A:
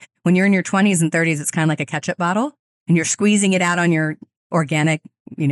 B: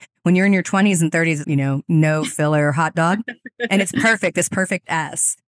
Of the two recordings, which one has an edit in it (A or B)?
B